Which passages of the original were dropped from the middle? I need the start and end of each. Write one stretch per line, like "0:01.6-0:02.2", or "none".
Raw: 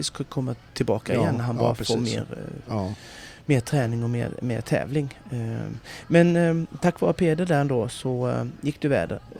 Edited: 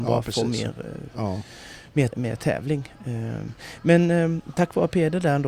0:03.6-0:04.4